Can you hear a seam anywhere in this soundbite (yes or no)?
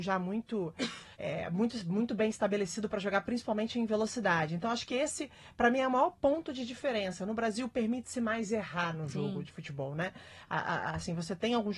yes